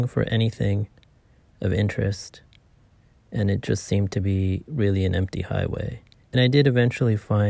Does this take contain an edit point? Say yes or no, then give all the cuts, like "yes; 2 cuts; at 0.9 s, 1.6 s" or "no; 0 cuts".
yes; 1 cut; at 6.2 s